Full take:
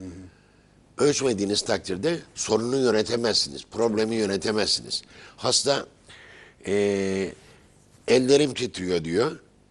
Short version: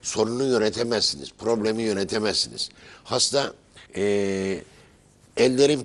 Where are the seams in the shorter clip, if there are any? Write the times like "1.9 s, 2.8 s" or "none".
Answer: 3.9 s